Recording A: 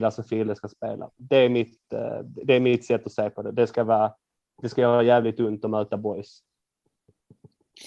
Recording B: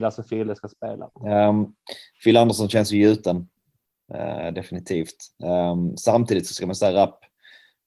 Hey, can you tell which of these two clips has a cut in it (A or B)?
B